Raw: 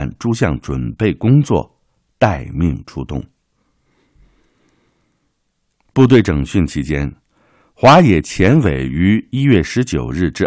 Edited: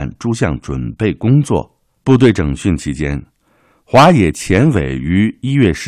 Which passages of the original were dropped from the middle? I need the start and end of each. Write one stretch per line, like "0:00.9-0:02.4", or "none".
0:02.0-0:05.9